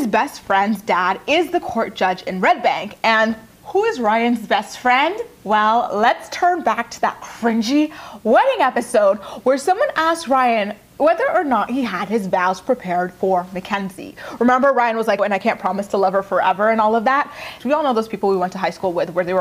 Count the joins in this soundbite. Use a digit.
2